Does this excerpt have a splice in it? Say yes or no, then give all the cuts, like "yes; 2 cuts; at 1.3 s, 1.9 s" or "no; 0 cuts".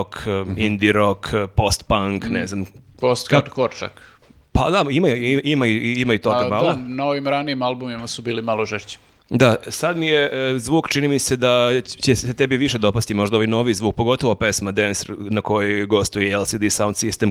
no; 0 cuts